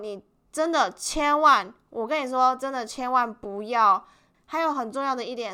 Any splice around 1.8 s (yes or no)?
no